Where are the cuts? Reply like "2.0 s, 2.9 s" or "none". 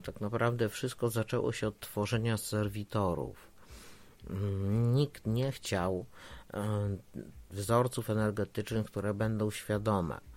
7.5 s